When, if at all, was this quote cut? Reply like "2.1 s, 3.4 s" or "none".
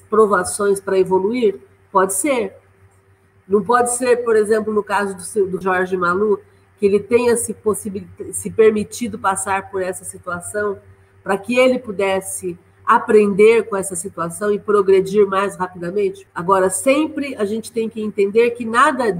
5.6 s, 16.3 s